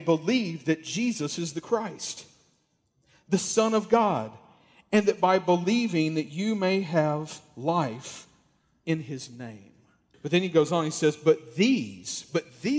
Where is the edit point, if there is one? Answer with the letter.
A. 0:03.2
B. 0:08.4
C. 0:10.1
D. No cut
C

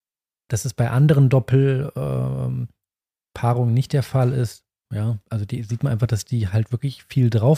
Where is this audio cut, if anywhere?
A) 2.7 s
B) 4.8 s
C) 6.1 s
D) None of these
B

